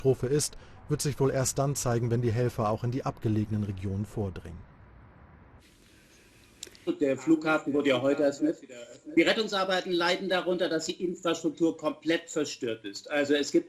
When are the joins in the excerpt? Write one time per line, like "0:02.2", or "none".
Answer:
0:06.9
0:08.4